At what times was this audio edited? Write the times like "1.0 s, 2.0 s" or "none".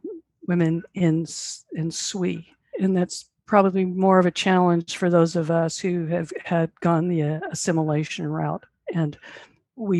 2.7 s